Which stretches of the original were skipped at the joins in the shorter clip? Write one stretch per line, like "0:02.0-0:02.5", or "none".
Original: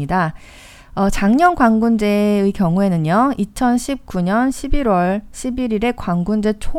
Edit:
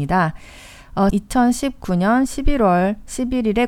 0:01.1-0:03.4